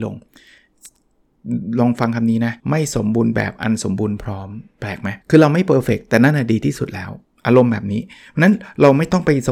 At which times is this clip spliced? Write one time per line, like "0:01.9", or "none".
0:02.6
0:05.2